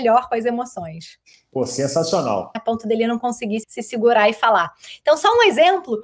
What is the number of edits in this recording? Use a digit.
2